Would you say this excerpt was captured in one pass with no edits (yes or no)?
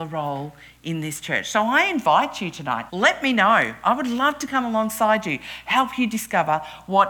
no